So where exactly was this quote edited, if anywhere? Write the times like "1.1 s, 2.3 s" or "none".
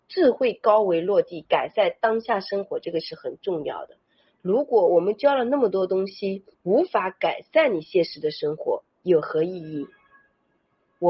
6.5 s, 8.9 s